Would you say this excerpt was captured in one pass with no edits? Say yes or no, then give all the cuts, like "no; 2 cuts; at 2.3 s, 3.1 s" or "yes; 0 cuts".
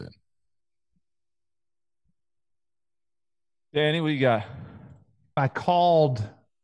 no; 1 cut; at 5.4 s